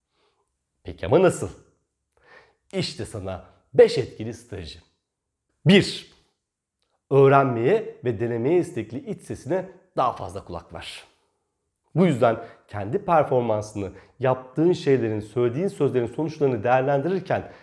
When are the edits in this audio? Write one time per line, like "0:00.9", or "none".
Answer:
0:11.8

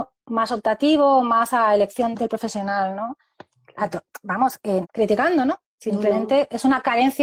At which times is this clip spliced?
0:02.1
0:04.8

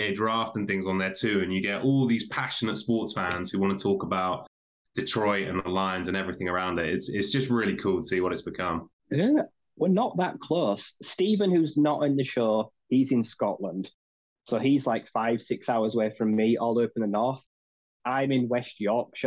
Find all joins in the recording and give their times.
0:08.9

